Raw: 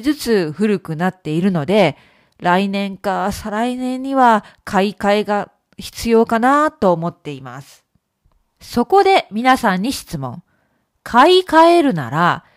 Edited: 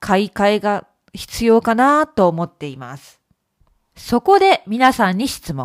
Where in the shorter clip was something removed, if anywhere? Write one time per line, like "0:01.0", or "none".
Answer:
none